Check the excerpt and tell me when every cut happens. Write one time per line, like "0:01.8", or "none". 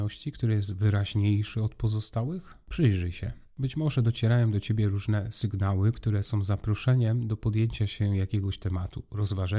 none